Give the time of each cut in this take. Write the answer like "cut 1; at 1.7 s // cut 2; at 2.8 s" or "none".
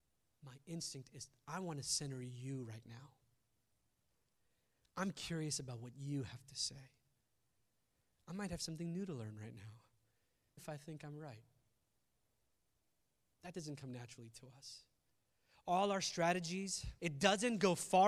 cut 1; at 10.6 s // cut 2; at 17.0 s